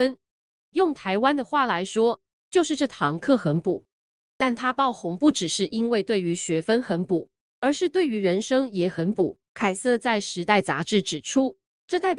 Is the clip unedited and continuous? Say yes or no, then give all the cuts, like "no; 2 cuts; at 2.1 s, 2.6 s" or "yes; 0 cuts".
no; 1 cut; at 9.4 s